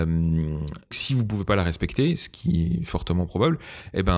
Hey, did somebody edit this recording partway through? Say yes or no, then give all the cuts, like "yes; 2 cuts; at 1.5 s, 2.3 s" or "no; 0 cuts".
yes; 1 cut; at 0.9 s